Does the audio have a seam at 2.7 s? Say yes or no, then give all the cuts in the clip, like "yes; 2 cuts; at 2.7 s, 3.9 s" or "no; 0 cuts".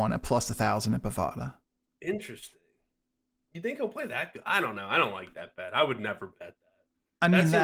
no; 0 cuts